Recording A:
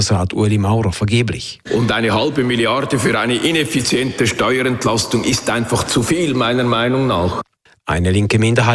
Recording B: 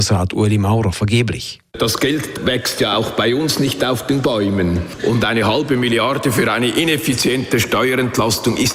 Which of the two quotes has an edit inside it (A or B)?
A